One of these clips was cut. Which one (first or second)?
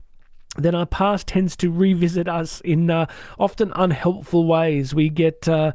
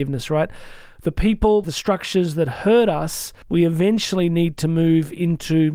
second